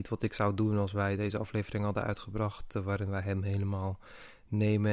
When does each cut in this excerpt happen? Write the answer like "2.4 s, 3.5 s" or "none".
none